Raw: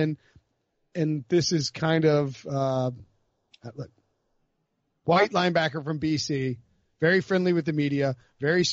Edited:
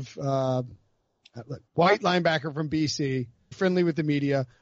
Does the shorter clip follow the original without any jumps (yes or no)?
no